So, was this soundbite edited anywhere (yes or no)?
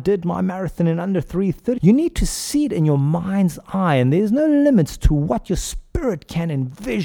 yes